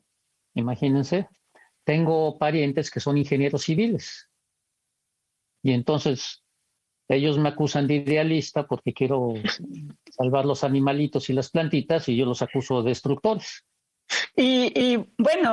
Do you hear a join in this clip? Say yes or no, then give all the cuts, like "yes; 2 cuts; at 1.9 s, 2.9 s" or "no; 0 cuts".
yes; 1 cut; at 14.3 s